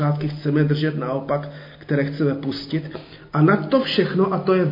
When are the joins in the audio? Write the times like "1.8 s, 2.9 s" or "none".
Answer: none